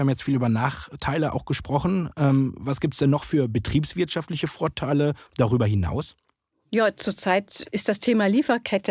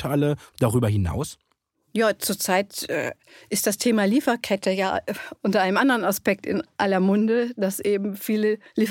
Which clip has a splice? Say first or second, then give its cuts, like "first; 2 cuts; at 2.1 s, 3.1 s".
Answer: first; 1 cut; at 7.6 s